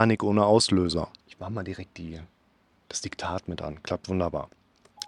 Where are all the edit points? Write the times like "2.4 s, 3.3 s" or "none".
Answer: 1.2 s

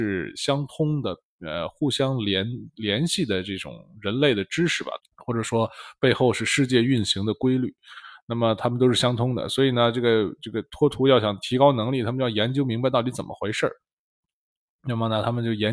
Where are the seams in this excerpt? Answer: 5.0 s

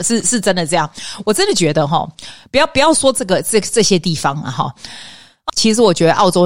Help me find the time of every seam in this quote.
5.5 s

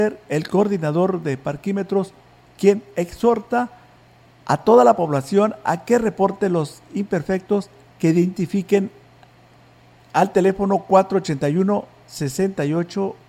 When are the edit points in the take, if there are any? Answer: 2.4 s

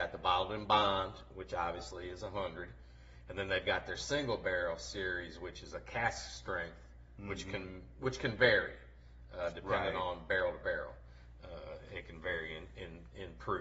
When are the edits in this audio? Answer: none

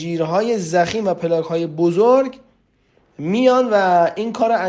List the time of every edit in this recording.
none

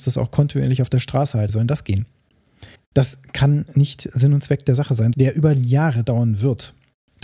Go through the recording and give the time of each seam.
1.5 s, 2.8 s, 5.1 s

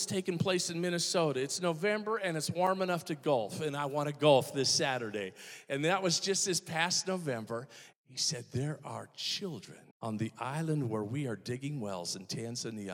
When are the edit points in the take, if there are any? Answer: 7.9 s, 9.9 s

